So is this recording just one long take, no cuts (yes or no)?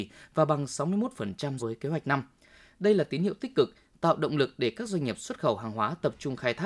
no